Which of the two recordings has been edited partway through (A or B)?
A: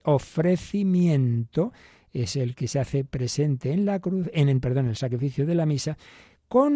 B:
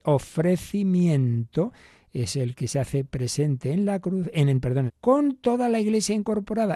B